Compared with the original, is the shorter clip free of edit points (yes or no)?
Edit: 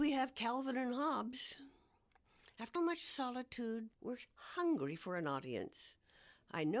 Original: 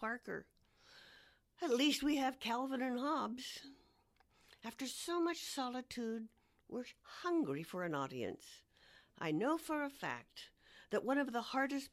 no